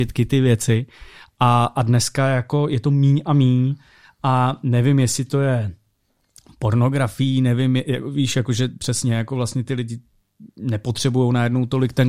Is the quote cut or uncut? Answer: uncut